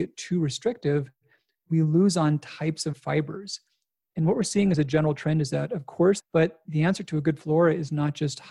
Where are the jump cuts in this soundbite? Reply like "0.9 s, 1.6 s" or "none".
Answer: 6.2 s